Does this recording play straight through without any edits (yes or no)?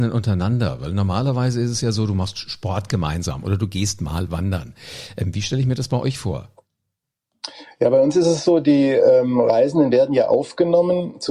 yes